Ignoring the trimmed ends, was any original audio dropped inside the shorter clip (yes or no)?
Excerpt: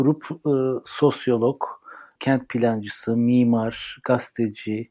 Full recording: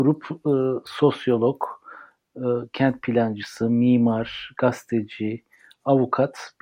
yes